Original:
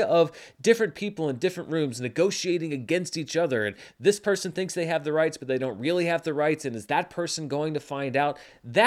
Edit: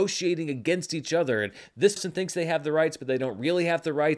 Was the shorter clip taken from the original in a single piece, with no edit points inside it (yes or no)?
no